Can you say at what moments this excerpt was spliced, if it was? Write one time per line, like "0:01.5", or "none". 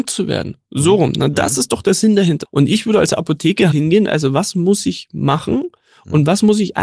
0:02.4
0:03.7